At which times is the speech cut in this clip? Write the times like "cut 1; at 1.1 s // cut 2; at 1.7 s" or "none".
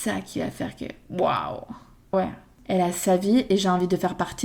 cut 1; at 2.1 s